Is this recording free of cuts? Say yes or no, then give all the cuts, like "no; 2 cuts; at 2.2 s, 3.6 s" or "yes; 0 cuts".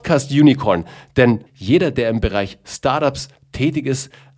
no; 1 cut; at 1.5 s